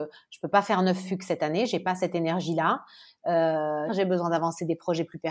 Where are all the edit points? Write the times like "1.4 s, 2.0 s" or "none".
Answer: 3.9 s